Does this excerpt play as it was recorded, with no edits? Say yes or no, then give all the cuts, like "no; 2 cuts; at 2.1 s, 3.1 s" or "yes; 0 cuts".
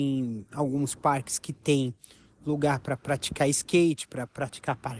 yes; 0 cuts